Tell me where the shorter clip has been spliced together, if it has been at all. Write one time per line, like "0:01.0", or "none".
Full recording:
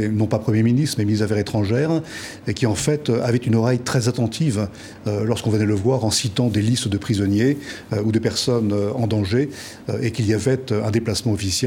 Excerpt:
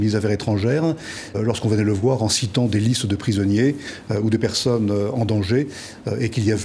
0:01.3